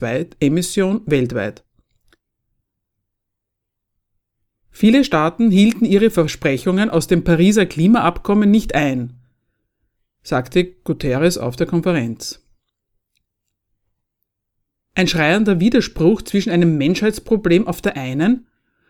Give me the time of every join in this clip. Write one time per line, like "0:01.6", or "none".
none